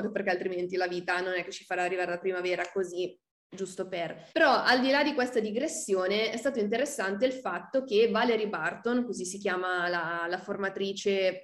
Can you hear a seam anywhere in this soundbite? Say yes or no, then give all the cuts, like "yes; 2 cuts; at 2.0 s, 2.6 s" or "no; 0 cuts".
yes; 1 cut; at 4.3 s